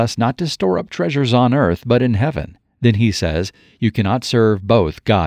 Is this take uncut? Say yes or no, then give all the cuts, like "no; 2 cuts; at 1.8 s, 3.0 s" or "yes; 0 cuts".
yes; 0 cuts